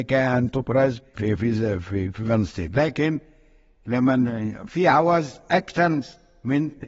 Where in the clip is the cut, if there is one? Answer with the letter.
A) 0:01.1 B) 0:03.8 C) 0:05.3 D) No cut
A